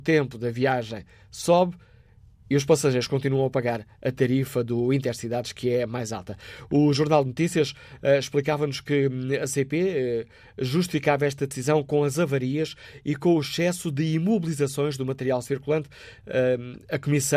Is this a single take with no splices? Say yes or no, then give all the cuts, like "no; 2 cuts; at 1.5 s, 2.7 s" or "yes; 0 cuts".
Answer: yes; 0 cuts